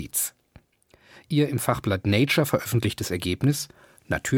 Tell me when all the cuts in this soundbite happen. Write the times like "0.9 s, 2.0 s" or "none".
none

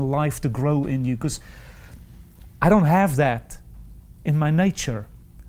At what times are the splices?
none

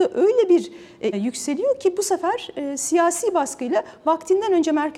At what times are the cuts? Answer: 1.1 s

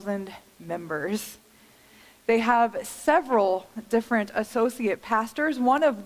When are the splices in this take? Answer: none

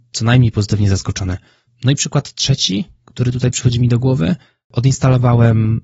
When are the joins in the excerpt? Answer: 1.7 s

